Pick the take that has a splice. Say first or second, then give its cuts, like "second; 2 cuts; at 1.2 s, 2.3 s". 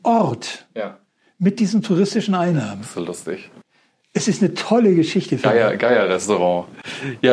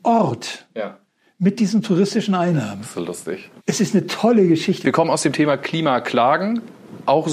second; 2 cuts; at 3.6 s, 4.8 s